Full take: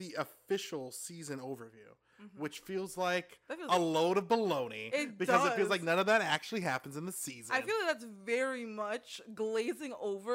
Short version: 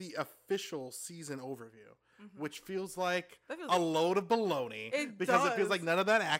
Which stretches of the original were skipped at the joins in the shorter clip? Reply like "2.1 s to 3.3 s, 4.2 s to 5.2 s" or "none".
none